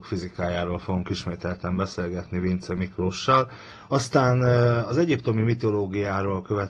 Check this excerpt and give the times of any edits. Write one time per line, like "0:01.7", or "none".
none